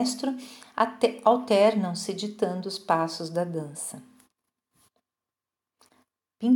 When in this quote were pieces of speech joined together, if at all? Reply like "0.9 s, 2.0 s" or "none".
none